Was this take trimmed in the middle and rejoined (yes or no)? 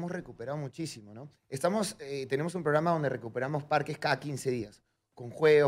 yes